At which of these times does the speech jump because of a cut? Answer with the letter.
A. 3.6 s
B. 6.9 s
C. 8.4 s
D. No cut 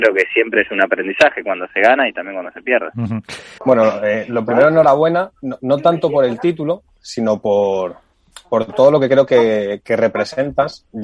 A